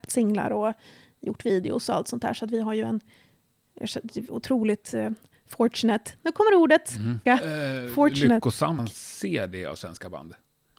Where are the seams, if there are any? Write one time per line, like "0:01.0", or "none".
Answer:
0:07.3
0:08.8